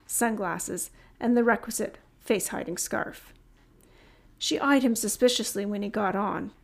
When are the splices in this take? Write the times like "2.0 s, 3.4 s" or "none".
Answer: none